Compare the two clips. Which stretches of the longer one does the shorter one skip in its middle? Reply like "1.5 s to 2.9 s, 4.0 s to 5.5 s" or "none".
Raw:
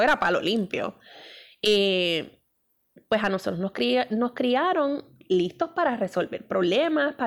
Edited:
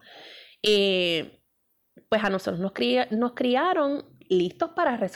none

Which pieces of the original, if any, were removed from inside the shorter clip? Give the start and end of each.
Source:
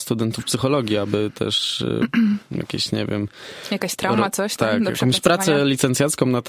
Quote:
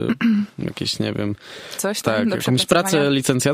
3.7 s to 4.3 s

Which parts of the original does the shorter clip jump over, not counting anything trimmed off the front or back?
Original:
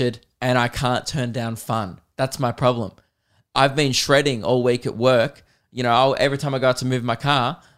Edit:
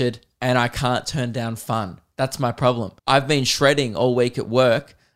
3.0 s to 3.5 s

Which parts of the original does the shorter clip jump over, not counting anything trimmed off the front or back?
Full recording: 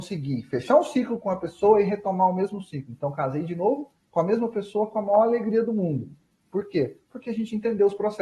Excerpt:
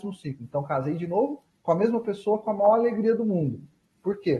none

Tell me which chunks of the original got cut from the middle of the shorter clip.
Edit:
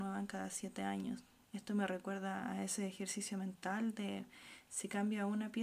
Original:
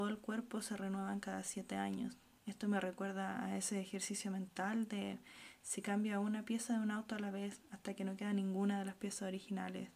none

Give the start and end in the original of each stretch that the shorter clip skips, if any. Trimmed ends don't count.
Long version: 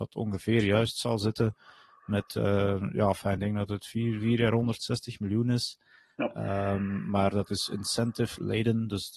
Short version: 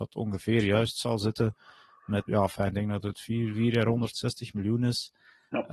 2.3 s to 2.9 s

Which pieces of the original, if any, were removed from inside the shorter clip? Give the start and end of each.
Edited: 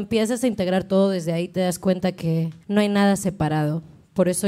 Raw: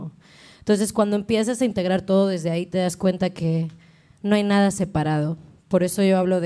3.8 s to 4.2 s

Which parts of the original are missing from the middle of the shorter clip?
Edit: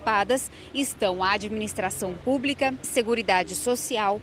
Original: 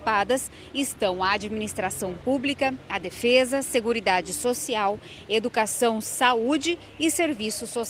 2.8 s to 3.6 s

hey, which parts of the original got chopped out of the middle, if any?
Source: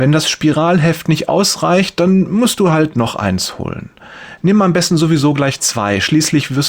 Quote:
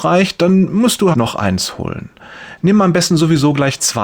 2.7 s to 2.9 s

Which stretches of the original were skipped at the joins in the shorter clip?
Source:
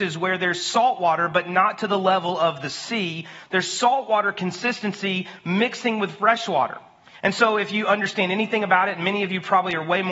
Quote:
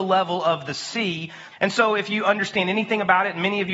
3.5 s to 7.1 s

